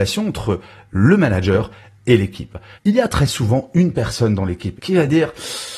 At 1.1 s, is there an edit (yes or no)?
no